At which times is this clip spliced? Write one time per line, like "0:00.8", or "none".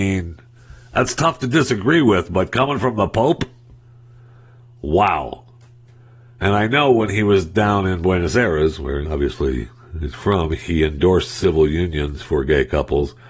0:09.0

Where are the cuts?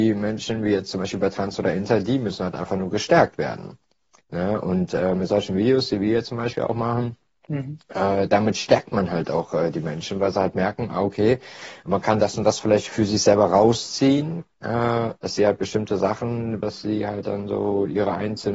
0:15.2
0:16.6

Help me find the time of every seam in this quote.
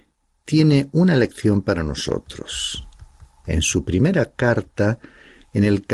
none

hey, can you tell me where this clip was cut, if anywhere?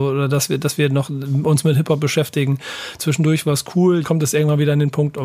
0:03.0
0:04.0

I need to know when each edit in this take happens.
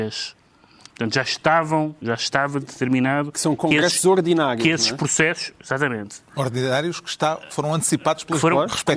none

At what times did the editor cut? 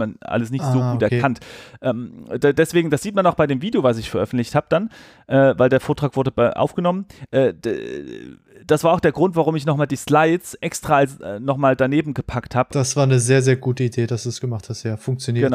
none

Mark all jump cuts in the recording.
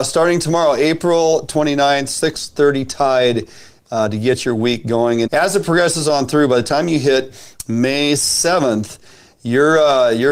0:05.3

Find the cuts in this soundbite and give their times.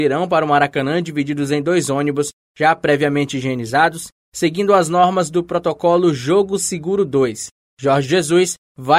none

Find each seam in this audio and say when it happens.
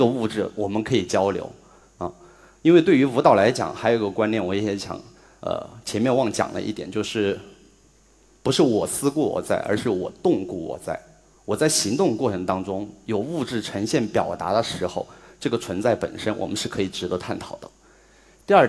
none

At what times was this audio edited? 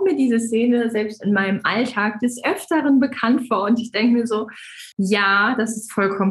0:04.9

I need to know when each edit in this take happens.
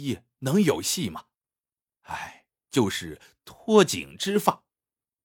0:02.6

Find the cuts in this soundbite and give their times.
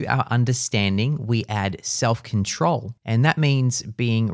0:03.0

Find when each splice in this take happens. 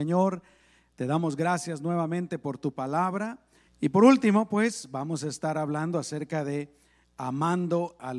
0:03.7

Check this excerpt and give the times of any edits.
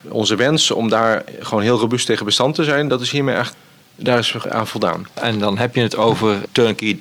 none

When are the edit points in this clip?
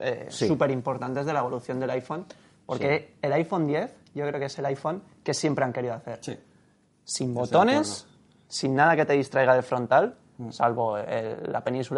none

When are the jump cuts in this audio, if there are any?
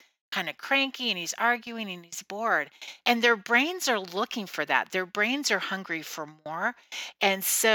0:03.0

